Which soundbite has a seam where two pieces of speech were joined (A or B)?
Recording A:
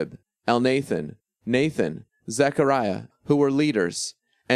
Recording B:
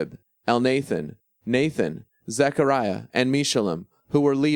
A